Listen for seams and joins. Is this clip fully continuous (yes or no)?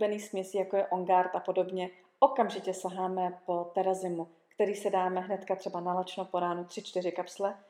yes